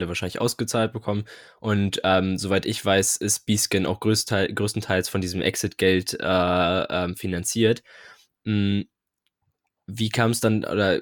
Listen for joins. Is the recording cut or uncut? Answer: uncut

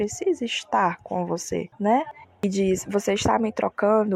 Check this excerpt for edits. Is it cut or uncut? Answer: cut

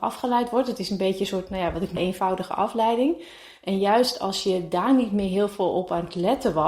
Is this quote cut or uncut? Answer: cut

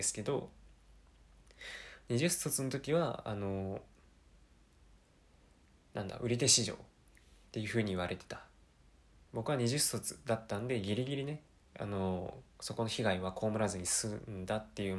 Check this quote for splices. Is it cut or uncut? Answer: cut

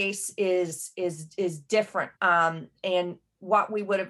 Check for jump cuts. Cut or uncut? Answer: cut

